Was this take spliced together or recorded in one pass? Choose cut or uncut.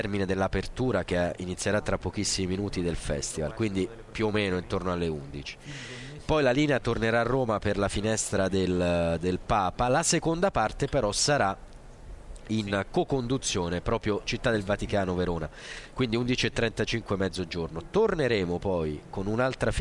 uncut